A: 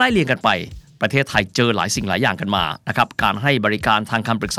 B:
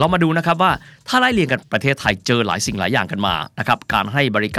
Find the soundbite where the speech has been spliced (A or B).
B